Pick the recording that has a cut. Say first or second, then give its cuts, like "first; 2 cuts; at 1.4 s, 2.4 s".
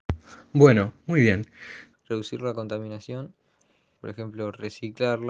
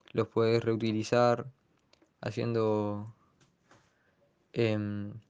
first; 2 cuts; at 1.9 s, 4.0 s